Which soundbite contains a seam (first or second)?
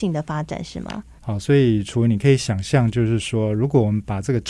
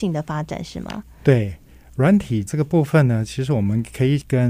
first